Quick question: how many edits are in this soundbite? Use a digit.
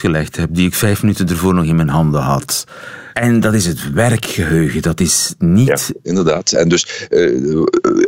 2